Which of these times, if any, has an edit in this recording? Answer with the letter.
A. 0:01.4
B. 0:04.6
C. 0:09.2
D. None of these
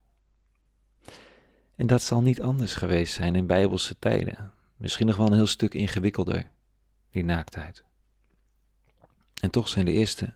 D